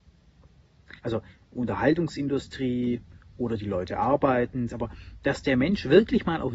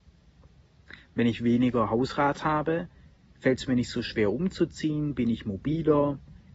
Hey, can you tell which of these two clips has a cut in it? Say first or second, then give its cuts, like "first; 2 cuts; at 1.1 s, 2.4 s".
first; 2 cuts; at 1.0 s, 4.7 s